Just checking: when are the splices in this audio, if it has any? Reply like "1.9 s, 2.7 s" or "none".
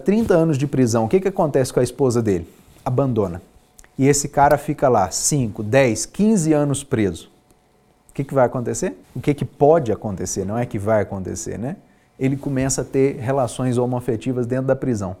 9.0 s